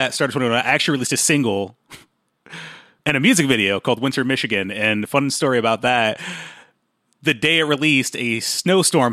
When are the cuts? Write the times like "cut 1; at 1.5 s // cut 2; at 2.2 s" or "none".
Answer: none